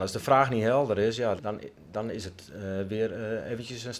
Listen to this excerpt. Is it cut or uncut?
cut